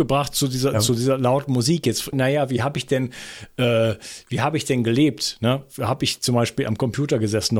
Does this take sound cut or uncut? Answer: cut